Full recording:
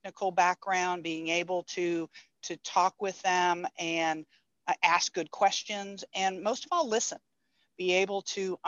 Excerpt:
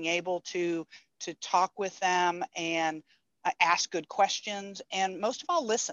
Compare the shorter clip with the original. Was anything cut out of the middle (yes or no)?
no